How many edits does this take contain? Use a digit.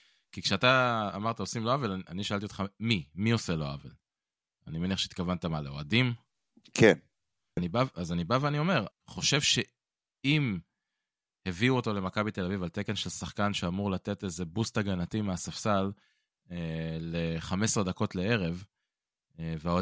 2